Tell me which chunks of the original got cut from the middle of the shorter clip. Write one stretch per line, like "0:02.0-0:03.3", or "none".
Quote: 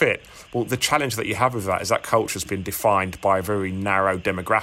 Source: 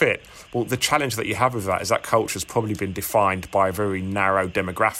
0:02.4-0:02.7